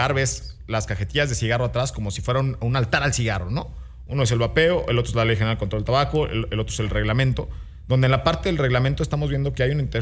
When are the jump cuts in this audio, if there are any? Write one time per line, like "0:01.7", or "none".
0:04.1